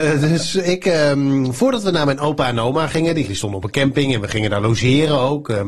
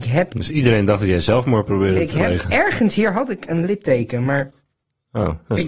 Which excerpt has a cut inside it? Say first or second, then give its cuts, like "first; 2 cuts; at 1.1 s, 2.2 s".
first; 1 cut; at 3.3 s